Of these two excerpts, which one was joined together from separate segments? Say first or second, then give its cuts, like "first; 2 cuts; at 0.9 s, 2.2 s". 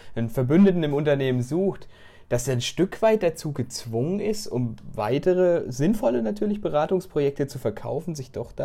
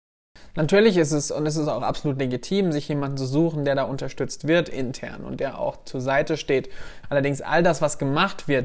second; 1 cut; at 7.0 s